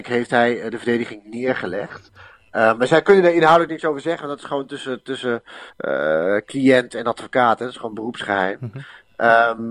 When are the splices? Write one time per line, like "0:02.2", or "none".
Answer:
none